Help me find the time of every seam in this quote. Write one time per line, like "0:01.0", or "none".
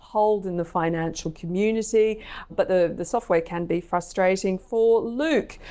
0:02.5